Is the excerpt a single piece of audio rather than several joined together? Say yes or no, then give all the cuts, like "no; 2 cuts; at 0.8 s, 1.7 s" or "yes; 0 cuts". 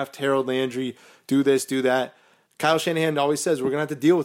no; 1 cut; at 2.4 s